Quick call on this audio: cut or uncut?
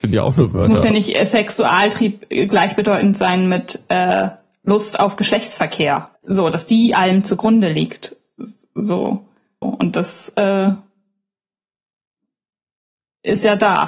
cut